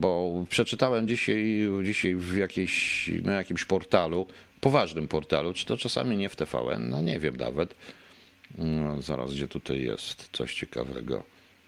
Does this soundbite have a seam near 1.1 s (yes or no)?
no